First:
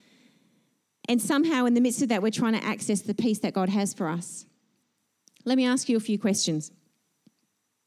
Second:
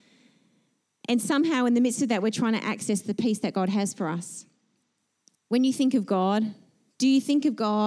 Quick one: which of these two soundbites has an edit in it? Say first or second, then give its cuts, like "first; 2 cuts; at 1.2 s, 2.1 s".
second; 1 cut; at 5.4 s